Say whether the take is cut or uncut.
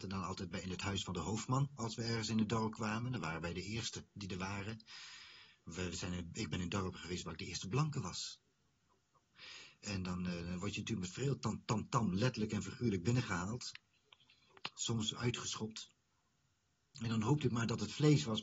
cut